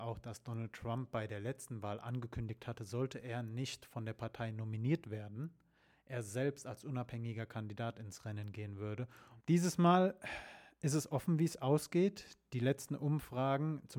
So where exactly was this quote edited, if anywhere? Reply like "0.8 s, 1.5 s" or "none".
9.4 s